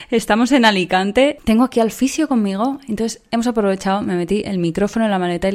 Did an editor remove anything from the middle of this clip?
no; 0 cuts

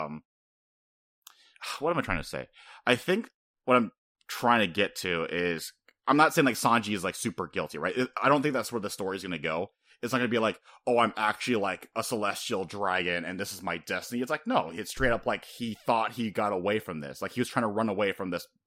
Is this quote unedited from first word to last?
yes; 0 cuts

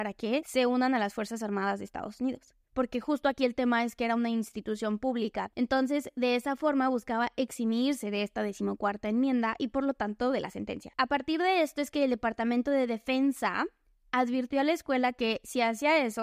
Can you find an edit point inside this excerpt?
yes; 2 cuts; at 2.6 s, 5.5 s

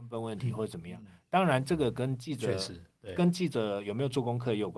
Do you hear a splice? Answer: no; 0 cuts

